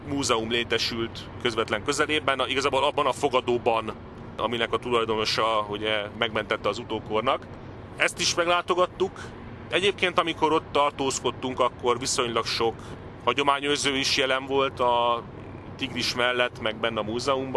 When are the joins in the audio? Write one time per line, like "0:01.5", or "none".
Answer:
none